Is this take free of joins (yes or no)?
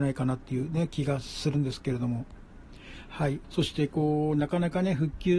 no